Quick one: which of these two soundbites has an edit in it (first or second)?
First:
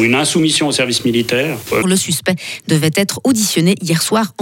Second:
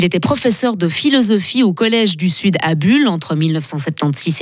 first